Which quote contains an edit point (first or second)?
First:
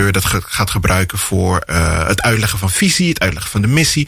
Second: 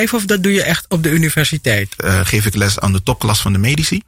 second